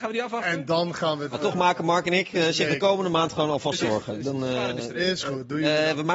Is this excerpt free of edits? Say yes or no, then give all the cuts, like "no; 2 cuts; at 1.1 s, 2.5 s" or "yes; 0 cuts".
yes; 0 cuts